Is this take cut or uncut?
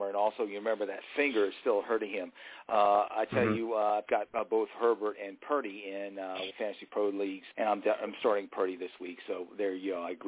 cut